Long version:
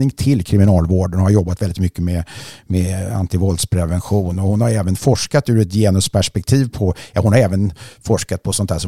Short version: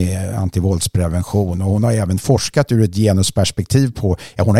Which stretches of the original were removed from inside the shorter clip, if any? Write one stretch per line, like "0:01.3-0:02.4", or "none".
none